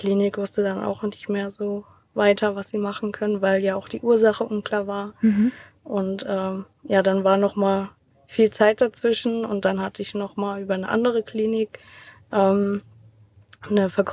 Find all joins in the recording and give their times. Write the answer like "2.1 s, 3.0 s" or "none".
none